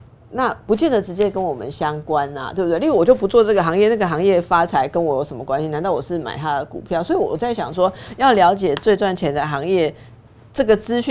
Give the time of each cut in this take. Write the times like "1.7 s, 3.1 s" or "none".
none